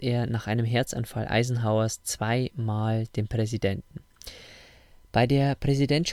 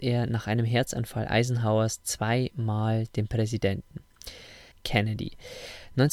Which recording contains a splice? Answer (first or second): second